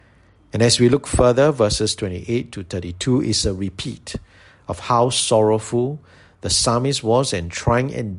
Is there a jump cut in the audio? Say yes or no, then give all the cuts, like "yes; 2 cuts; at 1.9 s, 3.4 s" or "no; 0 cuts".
no; 0 cuts